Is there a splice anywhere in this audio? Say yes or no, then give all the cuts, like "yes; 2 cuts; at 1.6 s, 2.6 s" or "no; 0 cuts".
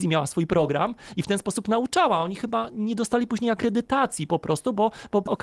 no; 0 cuts